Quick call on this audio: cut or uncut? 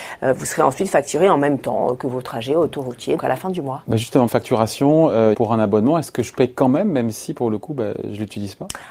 cut